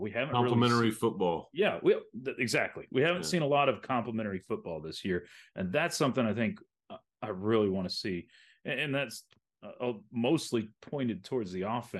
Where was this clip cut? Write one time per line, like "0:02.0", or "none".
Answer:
none